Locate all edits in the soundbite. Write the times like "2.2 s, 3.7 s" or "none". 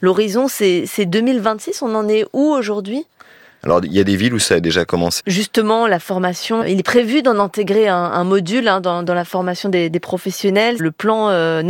5.2 s, 6.6 s, 10.8 s